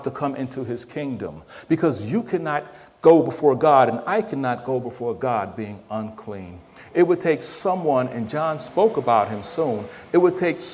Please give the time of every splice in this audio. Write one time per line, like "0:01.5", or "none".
none